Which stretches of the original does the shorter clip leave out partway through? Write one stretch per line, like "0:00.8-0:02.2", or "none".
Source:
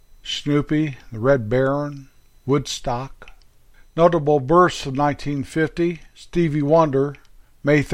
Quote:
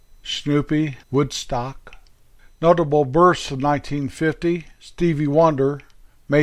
0:01.0-0:02.4